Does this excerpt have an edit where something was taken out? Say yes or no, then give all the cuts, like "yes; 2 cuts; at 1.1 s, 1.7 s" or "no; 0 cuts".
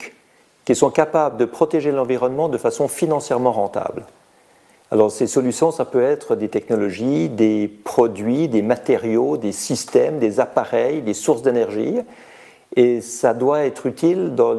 no; 0 cuts